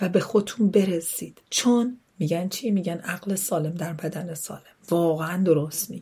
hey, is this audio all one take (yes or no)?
no